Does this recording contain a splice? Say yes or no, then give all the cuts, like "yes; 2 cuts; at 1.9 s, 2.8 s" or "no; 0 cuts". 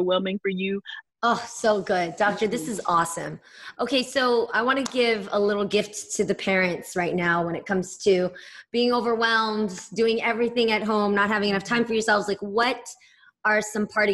yes; 1 cut; at 1.0 s